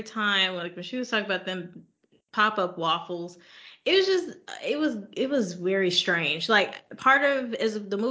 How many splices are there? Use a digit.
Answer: 0